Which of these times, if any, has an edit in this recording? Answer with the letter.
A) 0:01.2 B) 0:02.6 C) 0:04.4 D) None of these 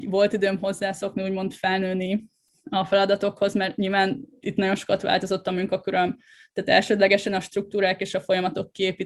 C